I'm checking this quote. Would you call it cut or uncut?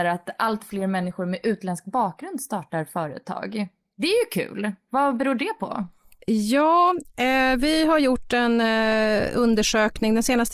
uncut